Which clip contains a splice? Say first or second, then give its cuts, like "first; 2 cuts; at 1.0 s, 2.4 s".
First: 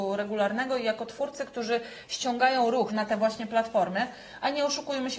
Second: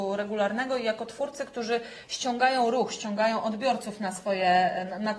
first; 1 cut; at 2.9 s